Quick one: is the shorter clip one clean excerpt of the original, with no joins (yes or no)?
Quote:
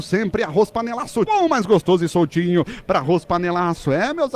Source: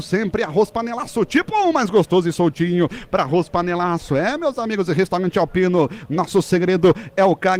no